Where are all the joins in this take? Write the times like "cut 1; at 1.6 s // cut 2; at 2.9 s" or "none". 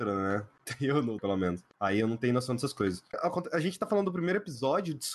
cut 1; at 1.2 s // cut 2; at 3.1 s